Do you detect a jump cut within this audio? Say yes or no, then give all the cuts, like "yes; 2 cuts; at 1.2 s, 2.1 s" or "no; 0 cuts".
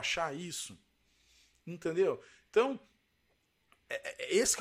no; 0 cuts